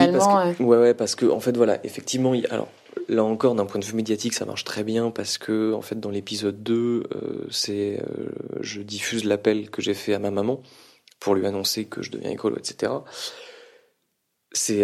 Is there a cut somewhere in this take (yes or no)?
no